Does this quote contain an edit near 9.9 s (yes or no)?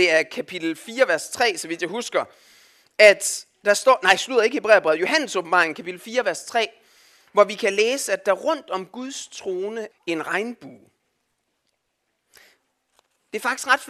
yes